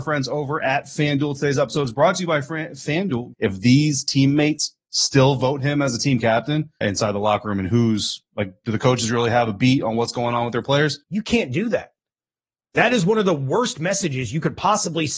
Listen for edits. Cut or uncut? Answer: cut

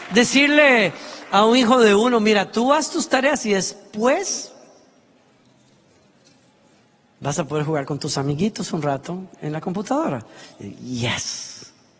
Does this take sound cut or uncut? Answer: uncut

